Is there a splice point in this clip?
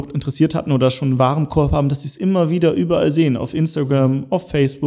no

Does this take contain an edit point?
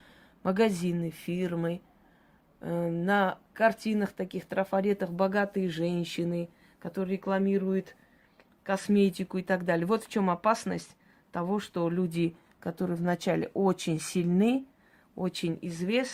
no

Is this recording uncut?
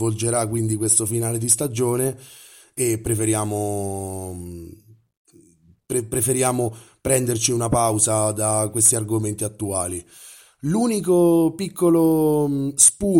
yes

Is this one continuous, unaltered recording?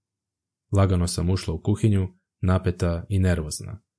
yes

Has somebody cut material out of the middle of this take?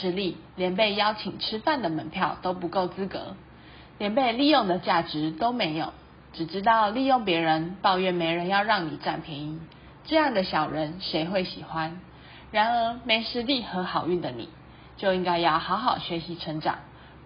no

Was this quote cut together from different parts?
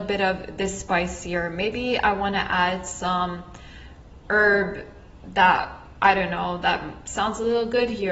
no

